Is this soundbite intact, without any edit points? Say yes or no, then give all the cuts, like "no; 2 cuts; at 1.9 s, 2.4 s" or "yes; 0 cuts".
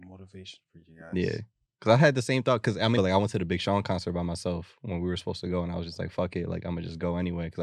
no; 1 cut; at 3.0 s